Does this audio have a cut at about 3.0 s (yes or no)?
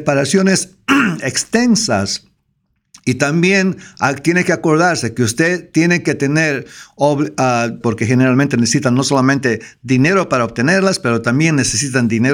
no